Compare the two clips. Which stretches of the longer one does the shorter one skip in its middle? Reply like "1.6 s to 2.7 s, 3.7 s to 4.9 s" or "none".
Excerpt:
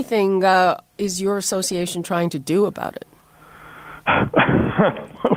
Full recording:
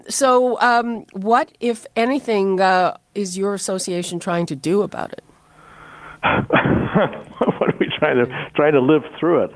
none